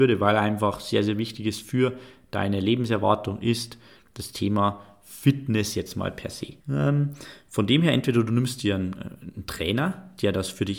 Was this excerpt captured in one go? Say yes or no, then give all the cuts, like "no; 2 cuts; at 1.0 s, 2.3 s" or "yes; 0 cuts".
no; 1 cut; at 6.6 s